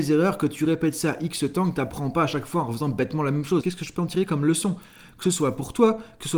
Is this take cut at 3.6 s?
yes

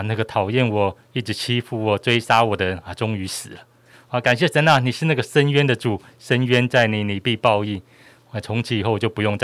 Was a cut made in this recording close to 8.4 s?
no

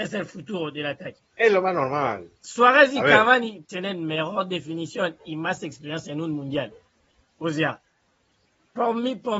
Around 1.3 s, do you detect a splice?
yes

